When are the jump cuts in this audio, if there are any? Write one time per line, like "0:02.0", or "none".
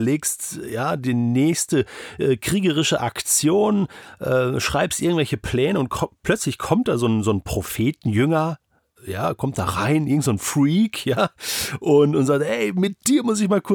none